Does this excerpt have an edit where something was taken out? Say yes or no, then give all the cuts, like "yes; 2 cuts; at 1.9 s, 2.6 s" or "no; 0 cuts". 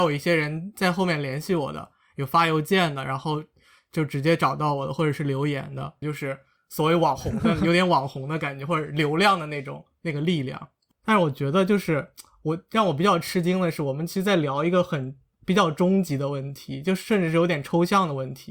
yes; 1 cut; at 6.0 s